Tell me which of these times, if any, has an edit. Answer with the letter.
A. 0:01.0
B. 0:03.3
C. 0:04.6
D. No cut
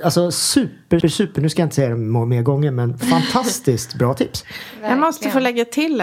A